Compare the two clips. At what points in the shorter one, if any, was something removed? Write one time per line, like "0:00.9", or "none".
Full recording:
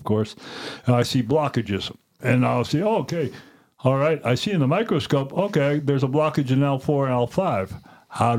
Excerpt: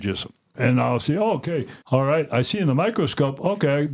0:01.8